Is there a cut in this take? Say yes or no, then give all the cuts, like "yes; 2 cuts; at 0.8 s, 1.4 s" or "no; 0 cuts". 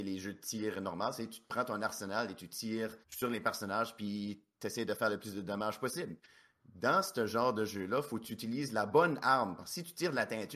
yes; 1 cut; at 3.0 s